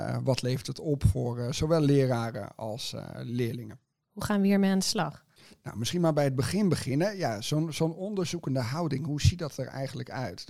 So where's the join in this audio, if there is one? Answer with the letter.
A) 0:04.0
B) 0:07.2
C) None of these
A